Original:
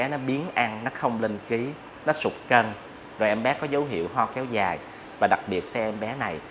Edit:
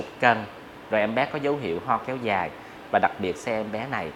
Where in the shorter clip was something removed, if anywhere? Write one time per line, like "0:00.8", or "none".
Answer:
none